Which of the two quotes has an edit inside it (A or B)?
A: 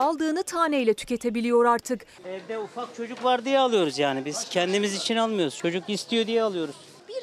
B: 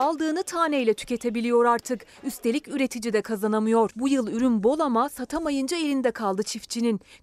A